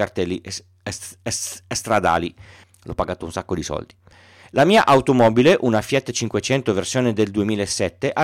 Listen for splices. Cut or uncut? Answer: cut